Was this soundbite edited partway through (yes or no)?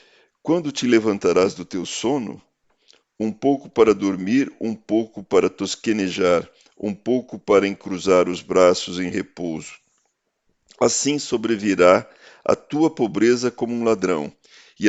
no